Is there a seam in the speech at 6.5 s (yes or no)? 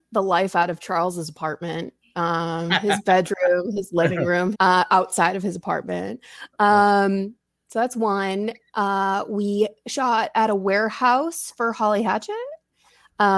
no